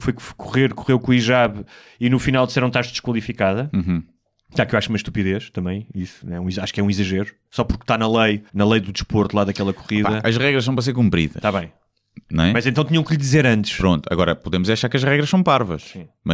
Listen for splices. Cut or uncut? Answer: cut